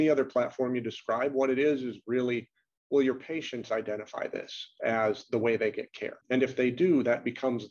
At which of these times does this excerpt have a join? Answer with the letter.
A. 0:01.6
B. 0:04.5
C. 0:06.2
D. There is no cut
C